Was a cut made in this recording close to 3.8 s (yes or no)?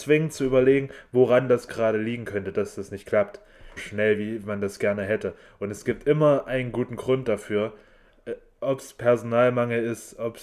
yes